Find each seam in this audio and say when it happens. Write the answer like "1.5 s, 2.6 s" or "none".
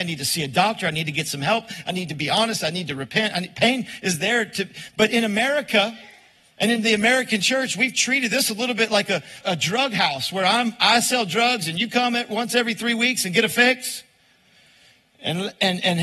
9.4 s

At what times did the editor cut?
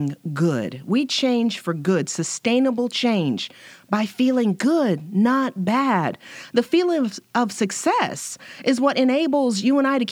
none

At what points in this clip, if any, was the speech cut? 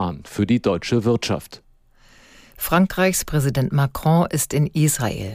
none

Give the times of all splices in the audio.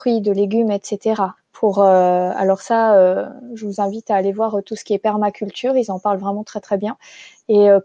1.4 s

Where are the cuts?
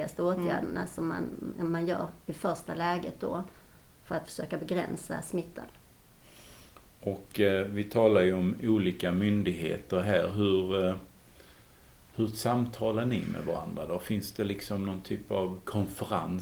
none

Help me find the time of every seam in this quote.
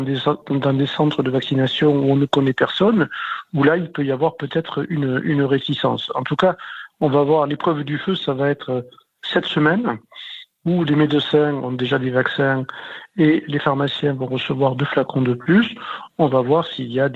none

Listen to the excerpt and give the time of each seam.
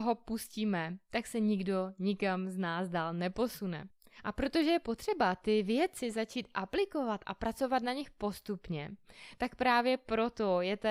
none

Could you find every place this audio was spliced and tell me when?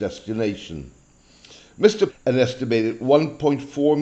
2.1 s

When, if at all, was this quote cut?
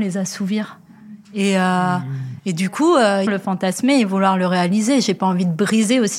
3.3 s

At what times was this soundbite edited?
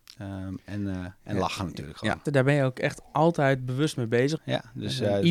2.2 s, 4.4 s

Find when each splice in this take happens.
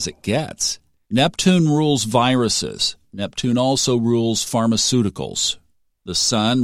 1.0 s

